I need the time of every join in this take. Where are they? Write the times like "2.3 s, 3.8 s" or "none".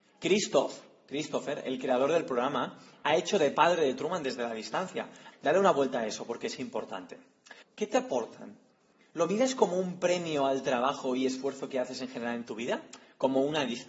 5.3 s, 7.6 s

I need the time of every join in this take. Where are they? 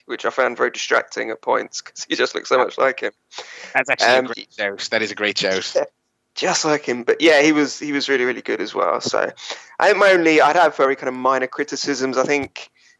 none

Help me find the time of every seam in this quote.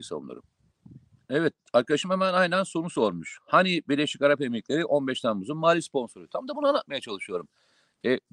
1.2 s

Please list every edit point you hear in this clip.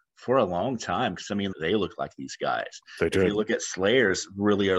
1.5 s

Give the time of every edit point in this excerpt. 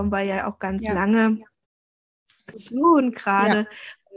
2.5 s

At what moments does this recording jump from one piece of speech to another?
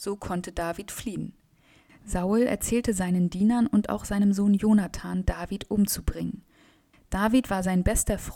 5.2 s, 6.9 s

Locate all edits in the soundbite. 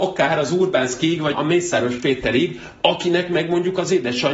1.3 s

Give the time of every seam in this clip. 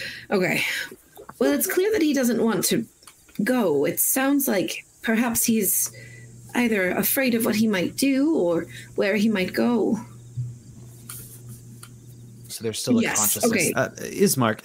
12.5 s, 13.7 s

